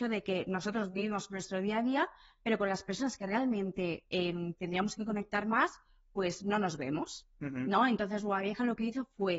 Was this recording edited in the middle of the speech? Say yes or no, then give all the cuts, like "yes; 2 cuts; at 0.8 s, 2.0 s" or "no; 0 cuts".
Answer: no; 0 cuts